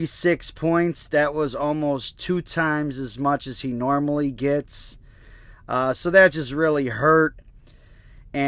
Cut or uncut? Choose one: uncut